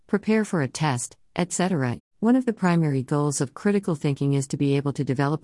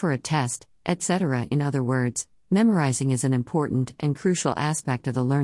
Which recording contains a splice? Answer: first; 1 cut; at 2.0 s

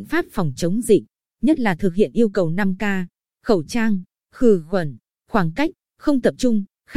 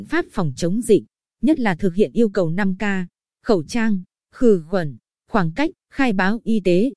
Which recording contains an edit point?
second; 1 cut; at 5.8 s

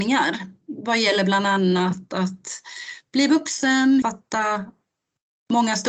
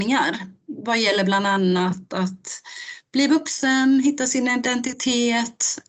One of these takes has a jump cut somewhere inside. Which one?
first; 1 cut; at 4.0 s

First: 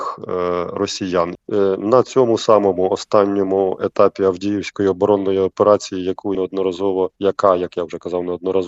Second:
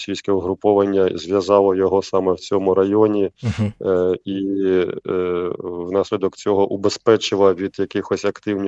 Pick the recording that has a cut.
first; 2 cuts; at 1.3 s, 6.3 s

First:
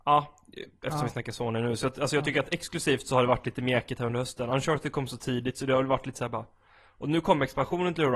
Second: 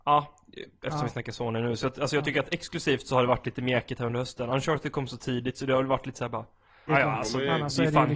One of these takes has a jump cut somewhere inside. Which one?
second; 1 cut; at 6.9 s

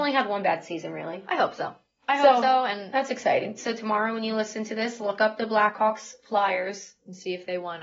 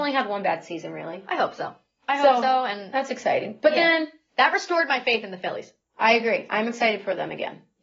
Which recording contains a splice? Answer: first; 1 cut; at 3.6 s

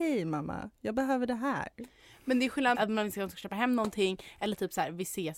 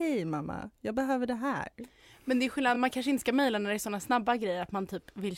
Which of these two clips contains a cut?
first; 1 cut; at 2.7 s

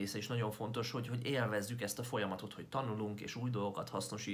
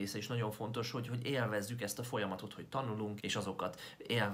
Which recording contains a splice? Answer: second; 1 cut; at 3.2 s

